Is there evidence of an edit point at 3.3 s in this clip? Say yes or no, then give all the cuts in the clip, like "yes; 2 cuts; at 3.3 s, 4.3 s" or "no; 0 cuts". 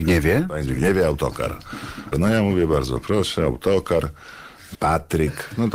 no; 2 cuts; at 2.1 s, 4.7 s